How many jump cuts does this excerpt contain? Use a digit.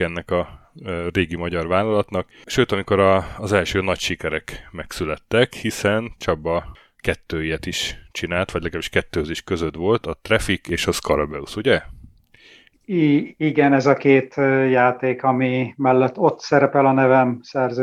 1